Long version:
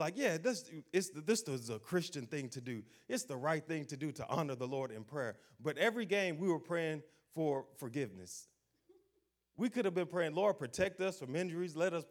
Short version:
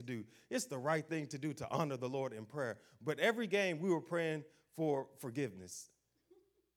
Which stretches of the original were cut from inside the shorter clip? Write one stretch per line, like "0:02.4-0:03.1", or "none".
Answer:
none